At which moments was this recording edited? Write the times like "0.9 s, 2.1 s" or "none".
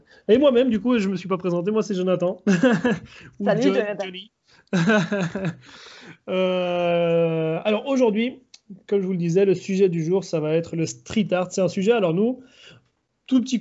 none